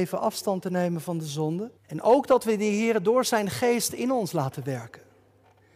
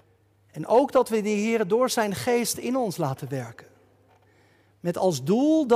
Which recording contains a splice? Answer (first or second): first